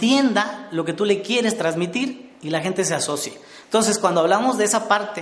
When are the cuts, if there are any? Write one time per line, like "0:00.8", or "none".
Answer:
0:03.6